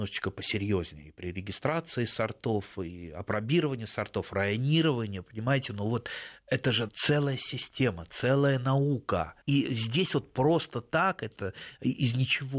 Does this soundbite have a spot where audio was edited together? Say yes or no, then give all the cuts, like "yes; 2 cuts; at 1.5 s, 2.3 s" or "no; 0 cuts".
yes; 2 cuts; at 6.9 s, 9.4 s